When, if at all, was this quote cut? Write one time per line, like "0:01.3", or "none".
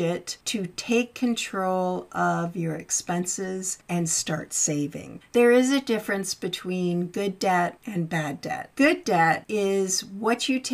0:05.3